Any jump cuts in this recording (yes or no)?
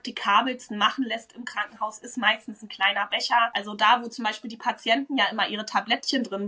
no